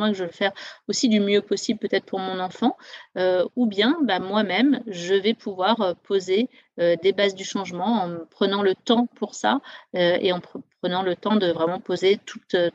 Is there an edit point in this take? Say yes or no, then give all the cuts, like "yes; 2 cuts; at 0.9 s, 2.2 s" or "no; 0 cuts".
no; 0 cuts